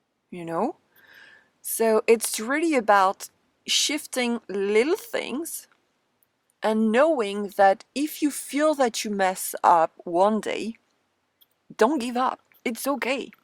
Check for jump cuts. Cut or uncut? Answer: uncut